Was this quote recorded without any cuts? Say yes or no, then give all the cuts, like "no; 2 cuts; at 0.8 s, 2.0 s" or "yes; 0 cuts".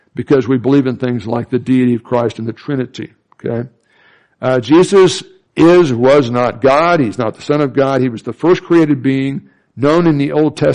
yes; 0 cuts